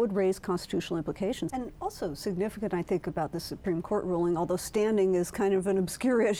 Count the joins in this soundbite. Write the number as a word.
one